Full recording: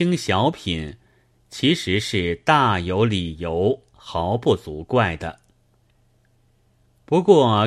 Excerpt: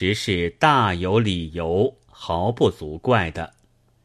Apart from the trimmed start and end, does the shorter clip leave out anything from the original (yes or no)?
no